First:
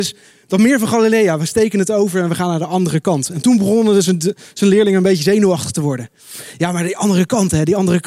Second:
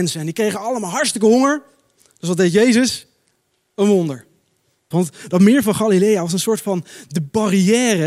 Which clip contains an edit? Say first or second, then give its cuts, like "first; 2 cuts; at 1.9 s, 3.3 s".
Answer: second; 1 cut; at 4.9 s